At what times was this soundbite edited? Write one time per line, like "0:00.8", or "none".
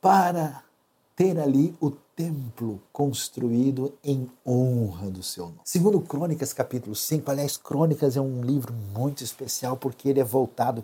0:05.6